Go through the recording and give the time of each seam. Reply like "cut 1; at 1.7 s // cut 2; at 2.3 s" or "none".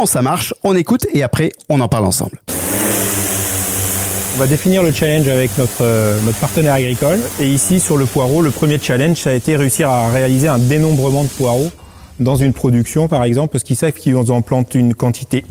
none